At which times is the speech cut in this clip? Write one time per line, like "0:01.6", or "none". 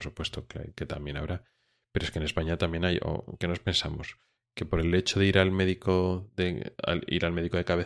none